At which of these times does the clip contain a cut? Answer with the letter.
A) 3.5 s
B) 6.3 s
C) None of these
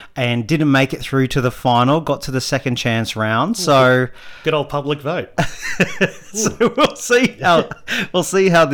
C